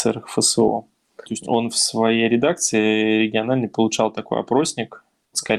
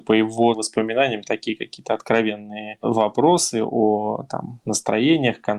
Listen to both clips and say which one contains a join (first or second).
first